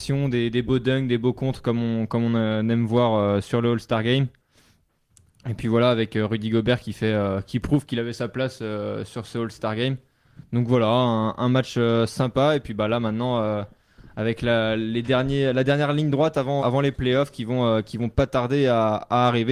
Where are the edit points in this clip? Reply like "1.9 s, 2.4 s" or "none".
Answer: 16.6 s